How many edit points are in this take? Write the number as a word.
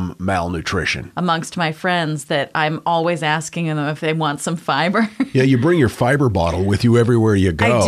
one